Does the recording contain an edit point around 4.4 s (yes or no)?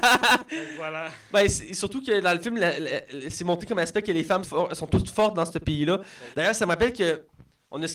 yes